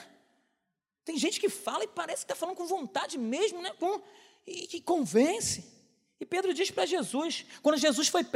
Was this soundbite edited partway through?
no; 0 cuts

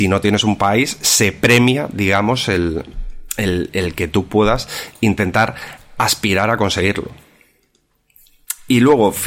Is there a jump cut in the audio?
no; 0 cuts

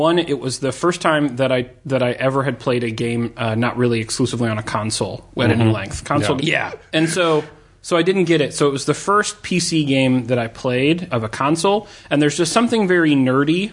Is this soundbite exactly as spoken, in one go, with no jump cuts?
no; 2 cuts; at 6.4 s, 11.1 s

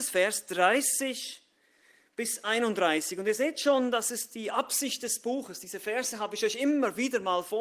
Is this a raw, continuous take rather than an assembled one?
yes; 0 cuts

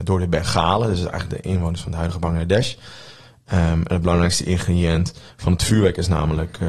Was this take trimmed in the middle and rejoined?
no; 0 cuts

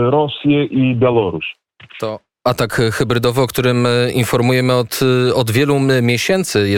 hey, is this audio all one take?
yes; 0 cuts

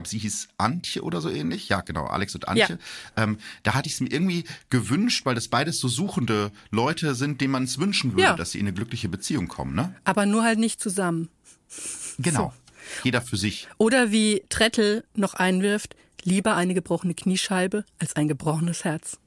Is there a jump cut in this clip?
no; 0 cuts

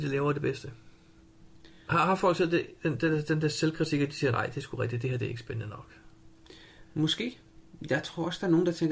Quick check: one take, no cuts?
yes; 0 cuts

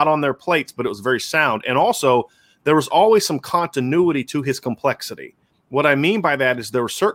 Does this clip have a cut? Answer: no; 0 cuts

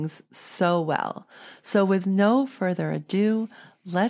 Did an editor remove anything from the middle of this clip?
no; 0 cuts

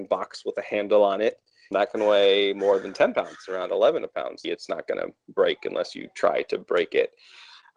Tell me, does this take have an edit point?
yes; 2 cuts; at 1.7 s, 4.4 s

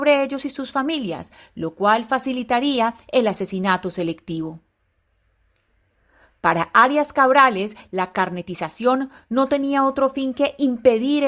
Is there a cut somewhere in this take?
no; 0 cuts

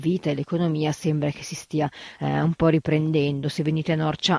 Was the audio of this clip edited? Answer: no; 0 cuts

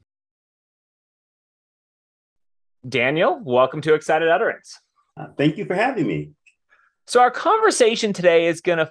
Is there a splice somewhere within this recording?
no; 0 cuts

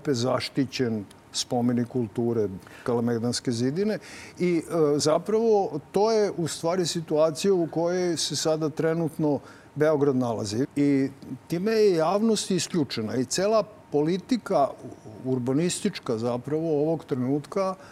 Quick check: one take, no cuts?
no; 2 cuts; at 10.6 s, 13.8 s

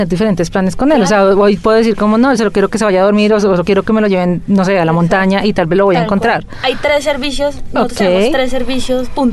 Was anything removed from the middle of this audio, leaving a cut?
yes; 1 cut; at 2.4 s

